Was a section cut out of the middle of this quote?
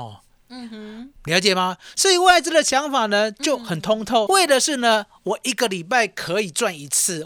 yes; 2 cuts; at 1.2 s, 4.3 s

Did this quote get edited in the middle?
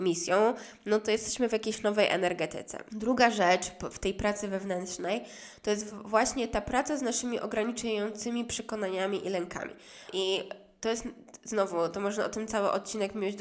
yes; 2 cuts; at 2.9 s, 10.1 s

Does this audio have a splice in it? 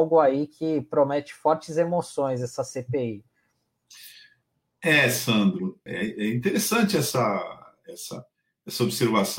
yes; 1 cut; at 5.9 s

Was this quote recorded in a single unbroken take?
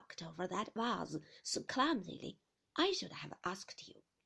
yes; 0 cuts

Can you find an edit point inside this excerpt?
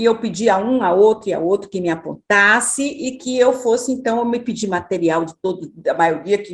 no; 0 cuts

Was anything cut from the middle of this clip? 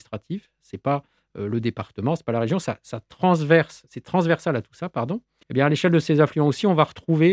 yes; 1 cut; at 5.4 s

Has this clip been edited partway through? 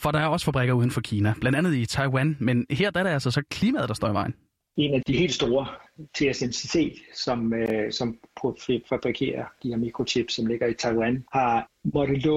yes; 1 cut; at 5.0 s

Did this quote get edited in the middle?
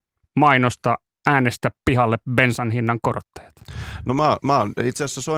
no; 0 cuts

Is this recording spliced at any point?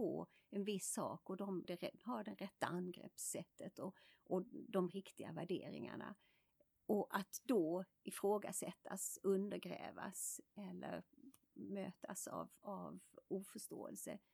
yes; 1 cut; at 1.6 s

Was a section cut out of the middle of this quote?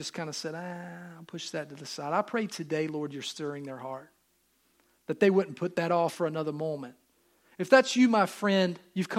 yes; 1 cut; at 6.1 s

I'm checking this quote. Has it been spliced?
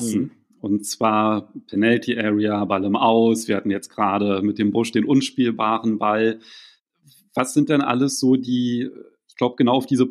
no; 0 cuts

